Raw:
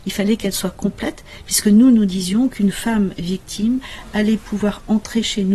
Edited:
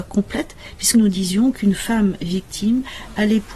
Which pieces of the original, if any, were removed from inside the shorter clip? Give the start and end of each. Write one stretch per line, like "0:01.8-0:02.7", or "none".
0:01.6-0:01.9